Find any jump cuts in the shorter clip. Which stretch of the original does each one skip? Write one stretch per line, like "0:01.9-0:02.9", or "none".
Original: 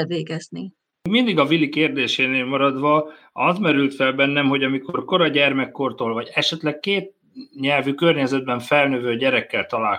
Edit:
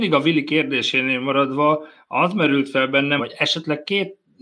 0:04.4-0:06.1